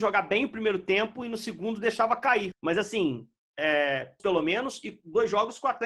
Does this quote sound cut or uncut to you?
cut